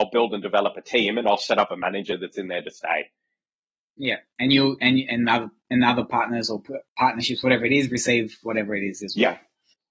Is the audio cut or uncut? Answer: uncut